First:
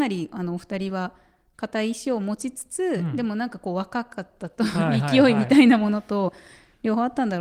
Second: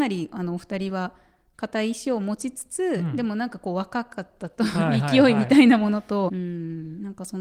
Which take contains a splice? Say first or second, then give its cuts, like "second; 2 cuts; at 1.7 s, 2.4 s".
second; 1 cut; at 6.3 s